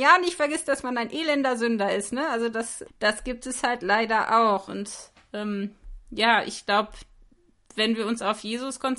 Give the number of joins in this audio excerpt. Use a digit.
2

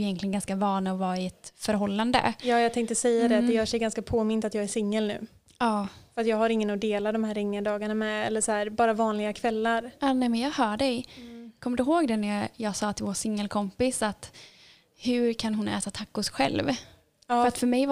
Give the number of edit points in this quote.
0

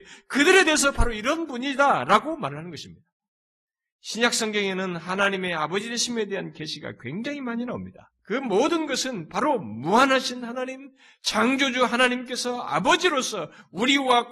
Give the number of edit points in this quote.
1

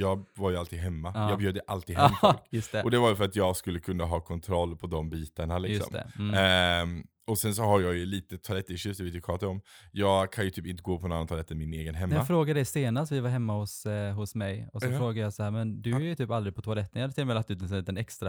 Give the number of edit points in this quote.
0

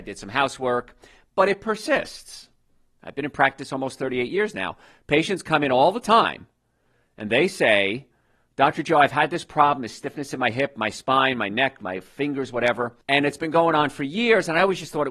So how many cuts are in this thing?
1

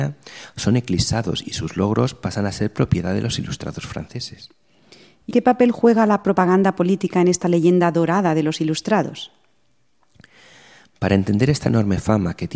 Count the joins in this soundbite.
1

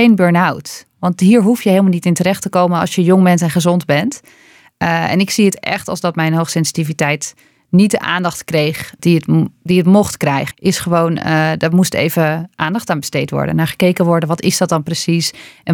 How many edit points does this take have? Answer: 2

